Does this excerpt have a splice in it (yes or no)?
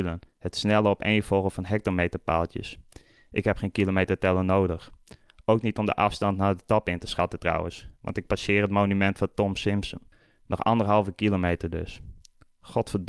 no